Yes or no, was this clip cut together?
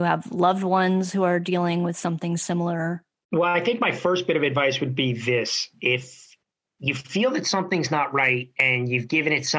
no